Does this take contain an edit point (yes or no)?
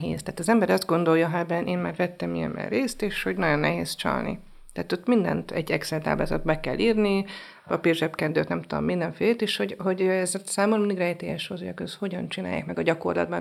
no